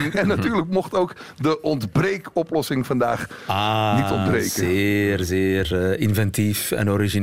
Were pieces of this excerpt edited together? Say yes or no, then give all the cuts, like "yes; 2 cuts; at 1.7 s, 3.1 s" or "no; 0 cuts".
no; 0 cuts